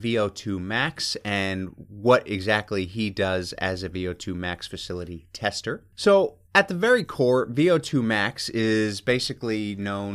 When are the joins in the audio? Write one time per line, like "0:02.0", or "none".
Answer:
none